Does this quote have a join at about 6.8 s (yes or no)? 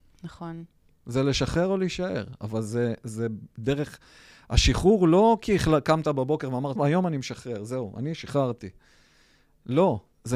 yes